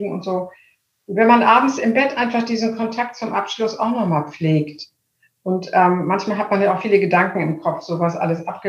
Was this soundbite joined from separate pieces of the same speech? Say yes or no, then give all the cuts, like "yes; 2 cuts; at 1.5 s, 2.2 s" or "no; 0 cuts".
no; 0 cuts